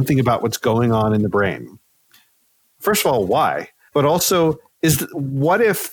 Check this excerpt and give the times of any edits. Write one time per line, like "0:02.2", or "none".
0:03.9